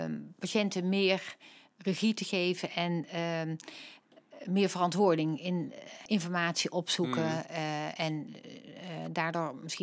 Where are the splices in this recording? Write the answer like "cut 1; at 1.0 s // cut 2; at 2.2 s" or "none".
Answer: cut 1; at 6.1 s